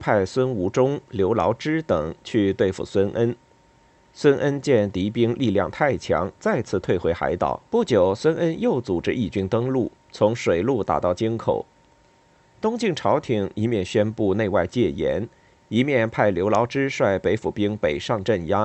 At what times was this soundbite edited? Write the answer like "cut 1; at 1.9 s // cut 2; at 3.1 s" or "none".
cut 1; at 7.7 s